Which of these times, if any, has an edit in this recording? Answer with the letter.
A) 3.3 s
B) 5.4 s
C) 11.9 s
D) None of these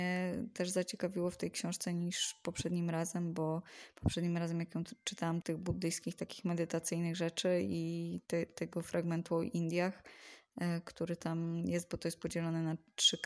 B